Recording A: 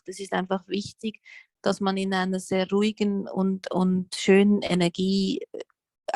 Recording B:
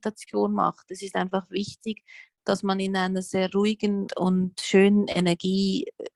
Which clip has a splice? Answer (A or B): B